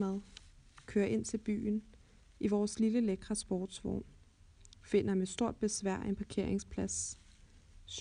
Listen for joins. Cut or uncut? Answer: uncut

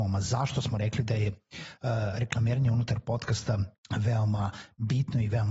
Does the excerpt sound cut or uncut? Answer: cut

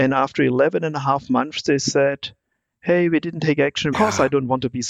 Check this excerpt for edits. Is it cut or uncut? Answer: cut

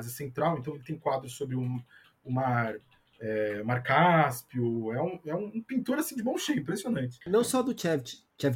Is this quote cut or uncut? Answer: uncut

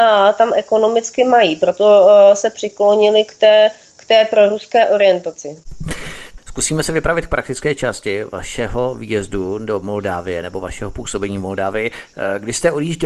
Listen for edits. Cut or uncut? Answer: uncut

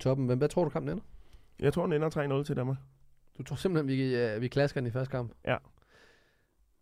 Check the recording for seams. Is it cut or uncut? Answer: uncut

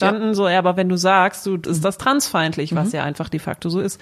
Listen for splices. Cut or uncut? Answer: cut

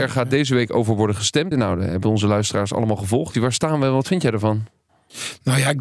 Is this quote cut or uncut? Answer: cut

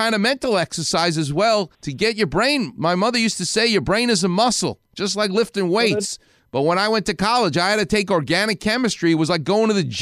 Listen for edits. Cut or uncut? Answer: cut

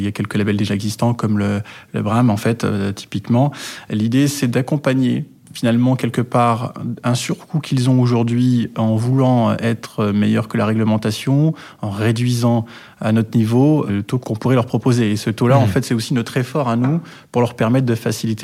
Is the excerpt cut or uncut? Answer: uncut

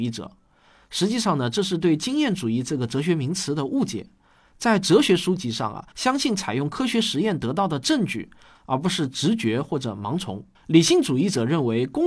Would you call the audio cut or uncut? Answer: cut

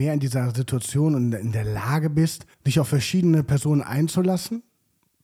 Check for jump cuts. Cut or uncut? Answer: cut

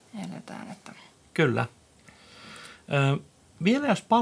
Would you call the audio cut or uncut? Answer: uncut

